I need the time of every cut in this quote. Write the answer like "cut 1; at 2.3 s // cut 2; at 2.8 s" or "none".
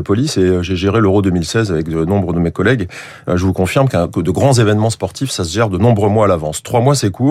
none

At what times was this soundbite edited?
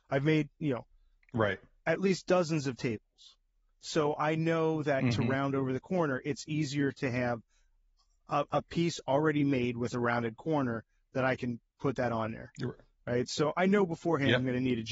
none

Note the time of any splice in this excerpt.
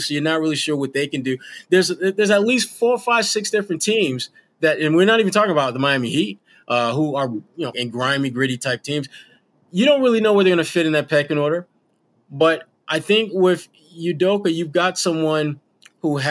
cut 1; at 7.7 s

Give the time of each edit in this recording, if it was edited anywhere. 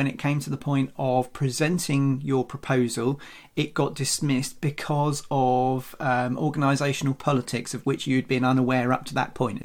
none

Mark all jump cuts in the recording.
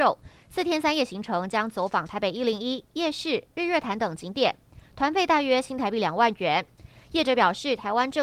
none

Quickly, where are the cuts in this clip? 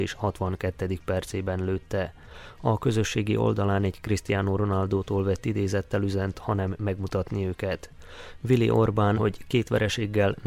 cut 1; at 6.3 s // cut 2; at 9.2 s

